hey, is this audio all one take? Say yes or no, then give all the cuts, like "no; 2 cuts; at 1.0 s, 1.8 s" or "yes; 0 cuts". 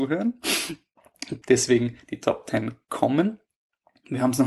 no; 1 cut; at 1.4 s